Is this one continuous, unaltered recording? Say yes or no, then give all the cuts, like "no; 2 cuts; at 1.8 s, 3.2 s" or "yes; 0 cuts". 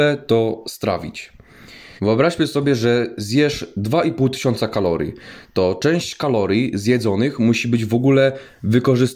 no; 1 cut; at 2.0 s